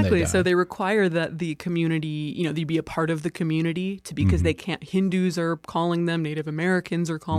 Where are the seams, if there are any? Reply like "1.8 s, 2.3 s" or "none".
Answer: none